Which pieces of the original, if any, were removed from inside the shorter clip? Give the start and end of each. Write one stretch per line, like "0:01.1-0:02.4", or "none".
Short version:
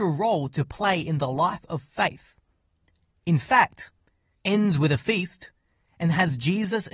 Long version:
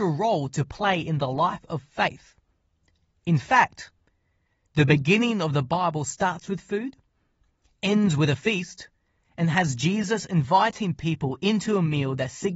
0:04.4-0:07.7